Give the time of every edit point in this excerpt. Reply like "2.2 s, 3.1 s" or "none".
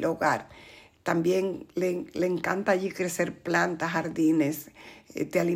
none